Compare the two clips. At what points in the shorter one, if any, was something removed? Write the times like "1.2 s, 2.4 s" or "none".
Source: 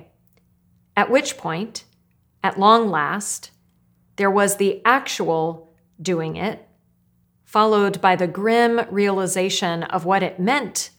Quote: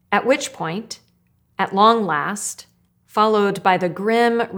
2.9 s